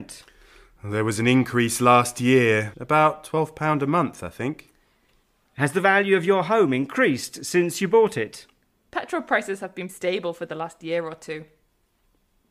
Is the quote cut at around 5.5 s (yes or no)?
no